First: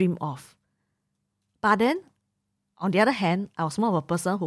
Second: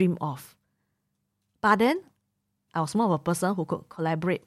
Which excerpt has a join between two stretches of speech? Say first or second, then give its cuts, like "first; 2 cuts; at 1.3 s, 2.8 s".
second; 1 cut; at 2.7 s